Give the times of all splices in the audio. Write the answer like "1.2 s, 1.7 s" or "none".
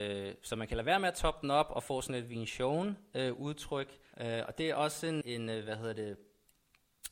4.1 s, 5.2 s